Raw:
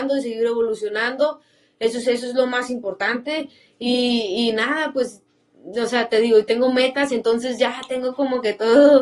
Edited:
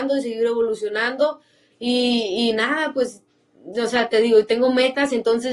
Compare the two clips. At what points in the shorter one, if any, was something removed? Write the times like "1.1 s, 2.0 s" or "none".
1.7 s